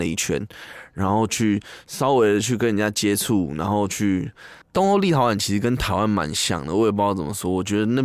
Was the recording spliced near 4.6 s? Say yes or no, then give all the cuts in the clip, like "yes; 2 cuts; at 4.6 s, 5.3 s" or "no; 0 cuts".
yes; 1 cut; at 4.6 s